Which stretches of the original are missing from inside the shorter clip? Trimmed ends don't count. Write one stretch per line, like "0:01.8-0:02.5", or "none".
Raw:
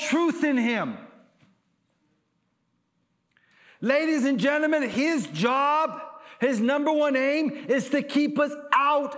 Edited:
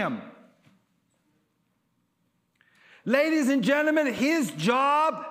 none